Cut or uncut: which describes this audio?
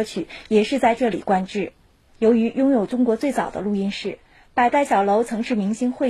uncut